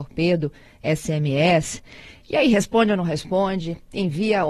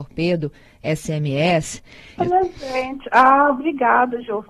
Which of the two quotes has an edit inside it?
second; 1 cut; at 2.2 s

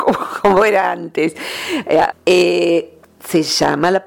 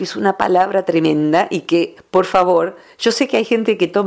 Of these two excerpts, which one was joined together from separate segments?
first; 1 cut; at 2.1 s

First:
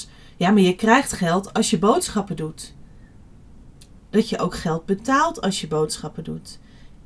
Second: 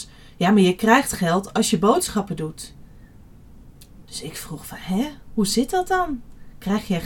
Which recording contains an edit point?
first; 1 cut; at 4.0 s

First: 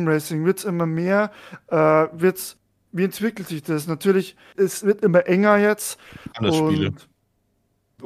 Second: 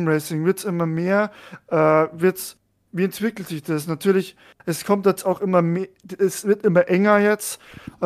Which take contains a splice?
first; 2 cuts; at 4.5 s, 6.3 s

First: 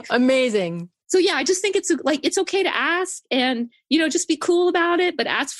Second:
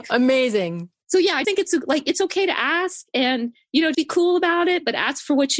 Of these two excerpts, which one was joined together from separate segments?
second; 2 cuts; at 1.4 s, 3.9 s

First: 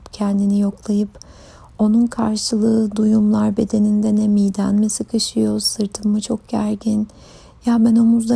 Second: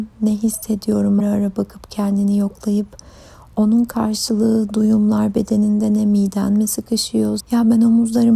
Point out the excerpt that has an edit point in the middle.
second; 2 cuts; at 1.2 s, 7.4 s

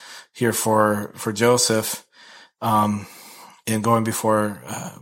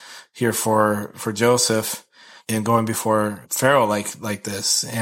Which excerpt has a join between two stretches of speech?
second; 2 cuts; at 2.4 s, 3.4 s

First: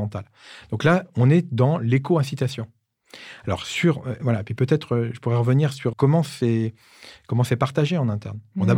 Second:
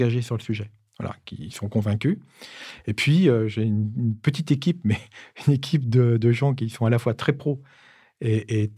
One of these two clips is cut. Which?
first; 1 cut; at 5.9 s

